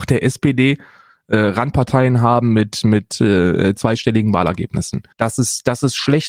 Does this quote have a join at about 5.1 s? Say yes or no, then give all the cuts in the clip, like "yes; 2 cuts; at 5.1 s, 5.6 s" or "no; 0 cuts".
yes; 1 cut; at 5.1 s